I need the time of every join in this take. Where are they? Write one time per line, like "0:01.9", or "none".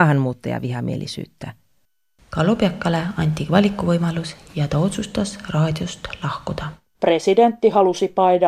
0:06.9

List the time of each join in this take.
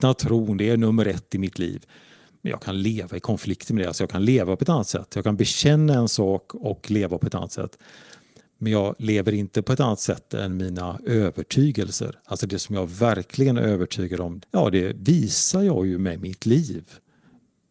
0:14.4

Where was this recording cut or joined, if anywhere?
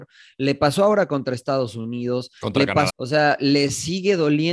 0:02.9

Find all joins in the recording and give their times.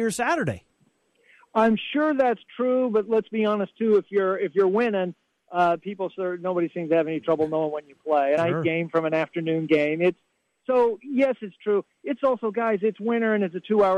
0:08.4

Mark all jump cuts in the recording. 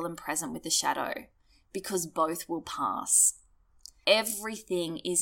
0:04.0

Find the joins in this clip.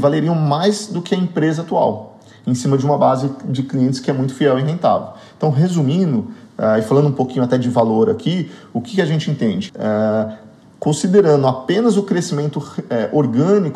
0:09.7

